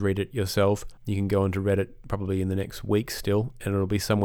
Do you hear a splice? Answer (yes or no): yes